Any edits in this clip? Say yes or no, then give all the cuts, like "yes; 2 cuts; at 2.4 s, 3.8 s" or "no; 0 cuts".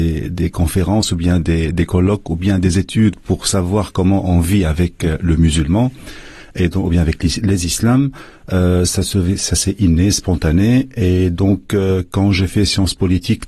no; 0 cuts